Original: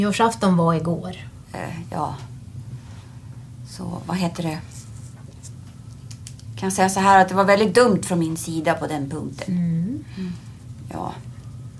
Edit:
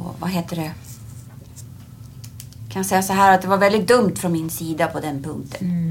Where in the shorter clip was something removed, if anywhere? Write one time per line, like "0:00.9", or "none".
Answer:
none